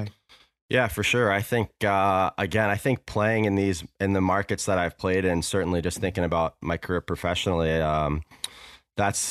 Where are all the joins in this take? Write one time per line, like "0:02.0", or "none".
none